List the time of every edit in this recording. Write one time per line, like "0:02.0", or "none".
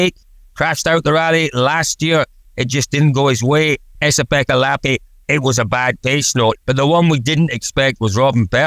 0:04.0
0:06.6

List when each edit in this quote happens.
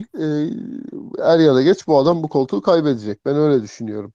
0:01.2

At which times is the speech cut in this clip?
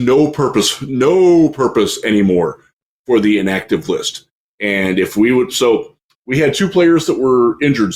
none

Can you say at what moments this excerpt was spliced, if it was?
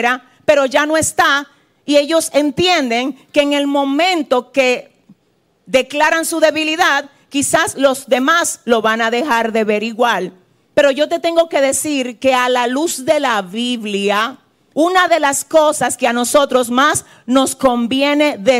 0:10.7
0:14.7

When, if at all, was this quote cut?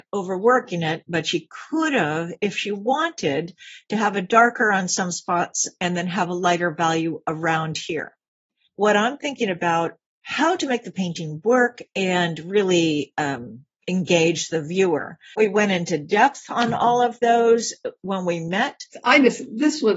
none

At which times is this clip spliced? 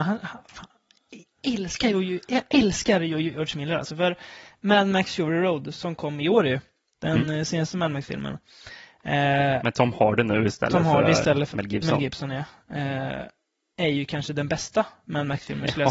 0:11.5

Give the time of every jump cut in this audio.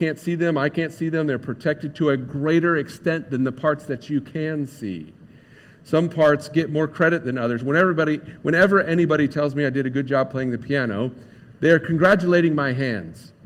none

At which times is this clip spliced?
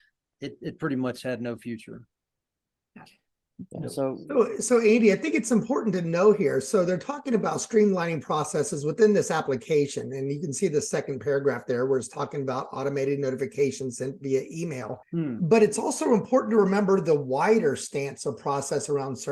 0:15.0

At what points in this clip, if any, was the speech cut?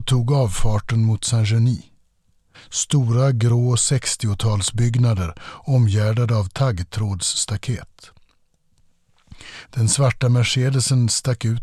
0:02.5
0:09.6

